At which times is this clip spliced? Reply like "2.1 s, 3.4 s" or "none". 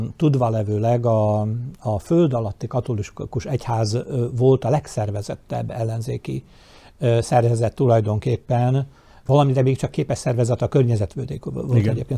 9.3 s